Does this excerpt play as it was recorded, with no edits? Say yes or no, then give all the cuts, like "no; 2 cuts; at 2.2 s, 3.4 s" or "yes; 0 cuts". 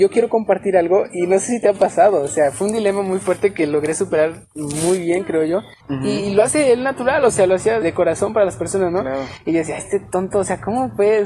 no; 2 cuts; at 5.8 s, 7.8 s